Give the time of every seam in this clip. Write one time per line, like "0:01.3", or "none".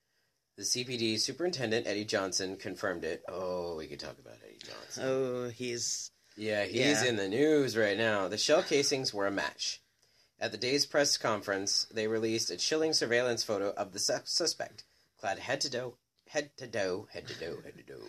none

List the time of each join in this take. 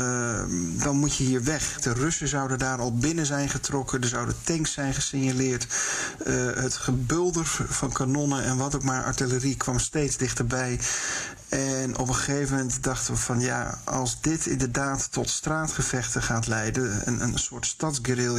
0:01.8

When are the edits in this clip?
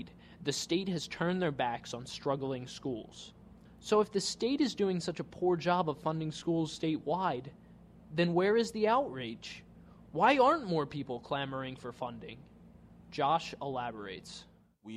none

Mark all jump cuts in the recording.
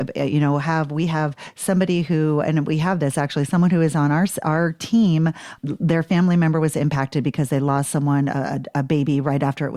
0:05.6

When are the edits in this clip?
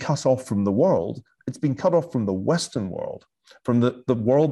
none

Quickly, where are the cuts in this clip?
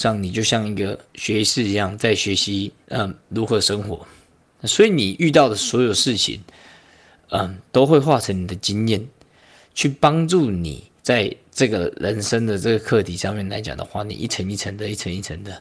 0:02.8
0:11.0

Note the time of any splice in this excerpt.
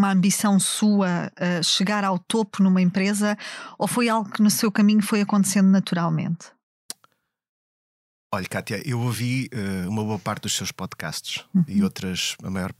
none

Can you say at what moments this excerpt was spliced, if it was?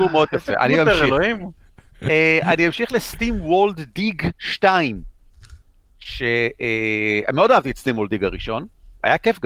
none

